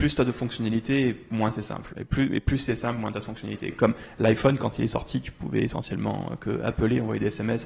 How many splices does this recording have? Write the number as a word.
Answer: zero